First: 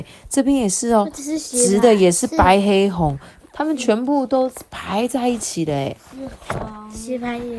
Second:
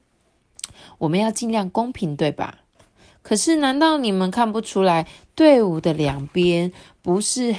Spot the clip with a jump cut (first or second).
first